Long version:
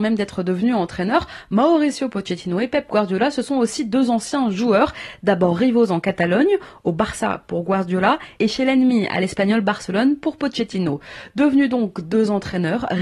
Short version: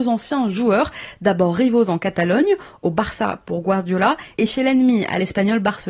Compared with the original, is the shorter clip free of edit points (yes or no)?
yes